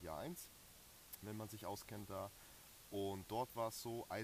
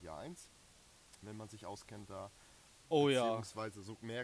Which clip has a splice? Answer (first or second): second